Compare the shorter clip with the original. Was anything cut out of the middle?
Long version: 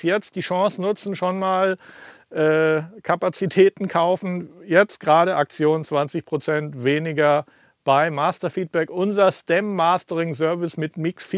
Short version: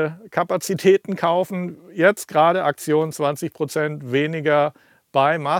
no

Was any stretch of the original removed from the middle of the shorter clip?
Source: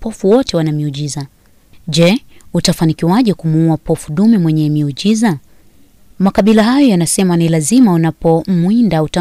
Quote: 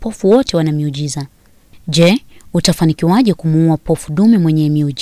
no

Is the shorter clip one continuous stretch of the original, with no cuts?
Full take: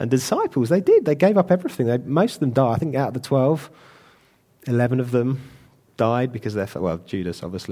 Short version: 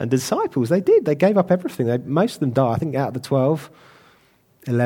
yes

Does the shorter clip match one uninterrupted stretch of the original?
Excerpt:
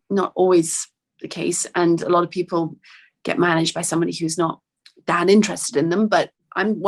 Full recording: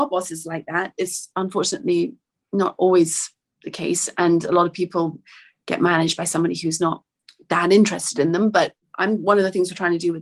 yes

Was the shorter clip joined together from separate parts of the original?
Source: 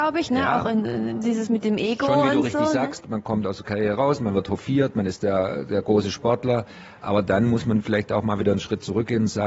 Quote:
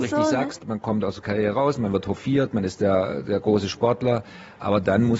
no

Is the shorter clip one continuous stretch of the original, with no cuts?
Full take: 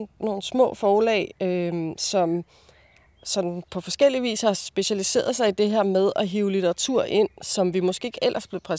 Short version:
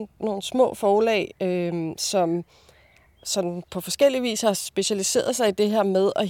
yes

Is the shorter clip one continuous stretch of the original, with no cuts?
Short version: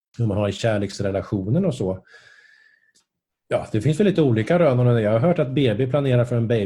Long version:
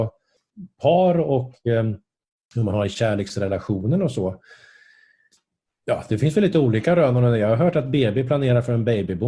yes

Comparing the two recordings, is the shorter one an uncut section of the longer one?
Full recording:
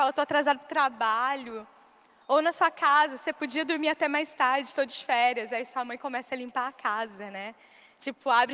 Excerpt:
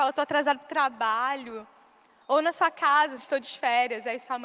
no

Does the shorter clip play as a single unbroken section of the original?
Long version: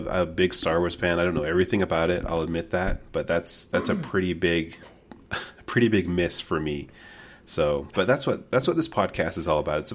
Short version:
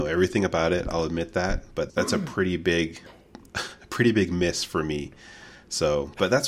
no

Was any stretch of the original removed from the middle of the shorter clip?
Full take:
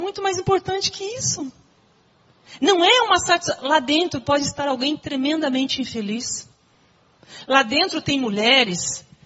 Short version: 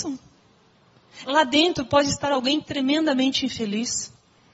yes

